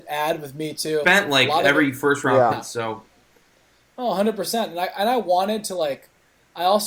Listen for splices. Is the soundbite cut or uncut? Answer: cut